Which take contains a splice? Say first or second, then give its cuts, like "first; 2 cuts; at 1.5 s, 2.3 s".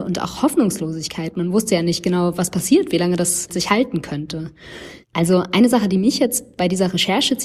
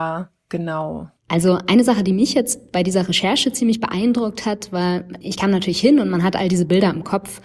first; 1 cut; at 5.0 s